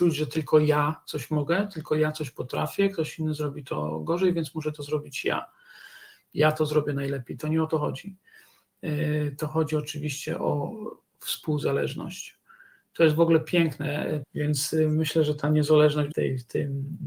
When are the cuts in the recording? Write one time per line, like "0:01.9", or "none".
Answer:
0:14.2
0:16.1